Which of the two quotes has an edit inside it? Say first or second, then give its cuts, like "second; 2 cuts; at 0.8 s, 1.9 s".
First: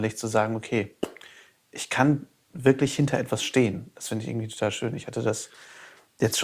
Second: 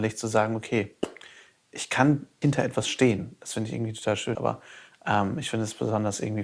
second; 2 cuts; at 2.4 s, 4.3 s